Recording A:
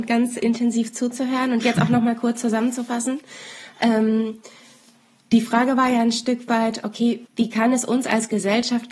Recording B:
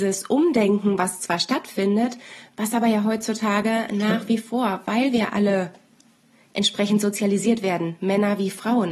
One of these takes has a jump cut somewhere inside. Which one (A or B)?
A